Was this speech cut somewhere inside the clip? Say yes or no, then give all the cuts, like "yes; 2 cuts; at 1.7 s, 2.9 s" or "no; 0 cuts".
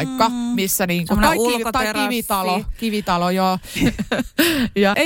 yes; 1 cut; at 3.8 s